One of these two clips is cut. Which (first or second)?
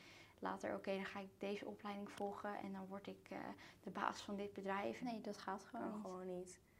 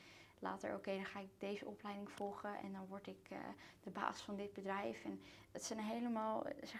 first